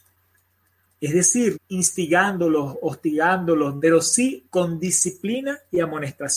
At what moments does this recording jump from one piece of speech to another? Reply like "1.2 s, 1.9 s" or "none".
1.5 s, 3.8 s